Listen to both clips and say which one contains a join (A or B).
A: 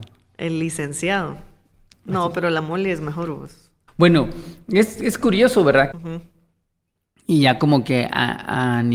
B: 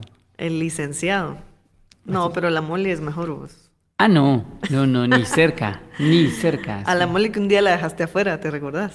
A